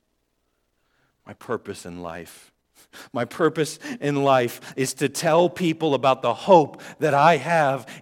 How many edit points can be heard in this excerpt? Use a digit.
0